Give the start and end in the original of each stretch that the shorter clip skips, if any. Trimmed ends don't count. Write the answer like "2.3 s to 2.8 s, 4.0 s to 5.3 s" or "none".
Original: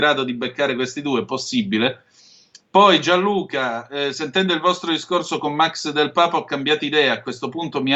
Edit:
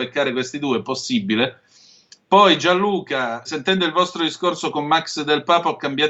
3.9 s to 4.1 s